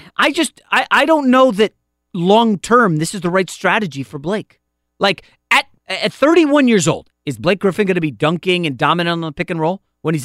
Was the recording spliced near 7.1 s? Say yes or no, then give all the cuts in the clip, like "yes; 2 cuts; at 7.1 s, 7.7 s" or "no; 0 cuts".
yes; 2 cuts; at 5.8 s, 7.1 s